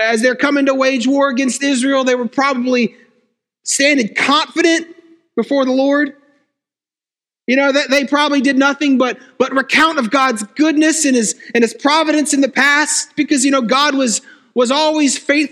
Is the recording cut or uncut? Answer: uncut